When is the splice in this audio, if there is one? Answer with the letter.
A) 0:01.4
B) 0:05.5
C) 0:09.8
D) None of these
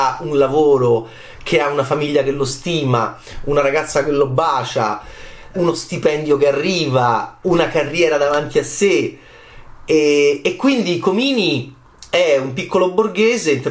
B